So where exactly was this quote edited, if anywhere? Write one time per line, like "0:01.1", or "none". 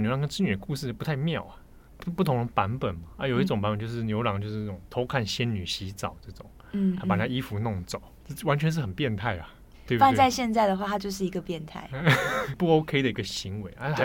none